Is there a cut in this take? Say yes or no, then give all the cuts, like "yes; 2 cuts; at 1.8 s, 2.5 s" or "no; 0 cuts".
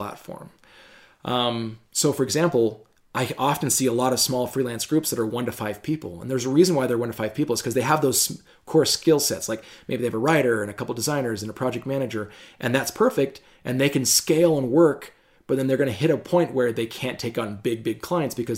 no; 0 cuts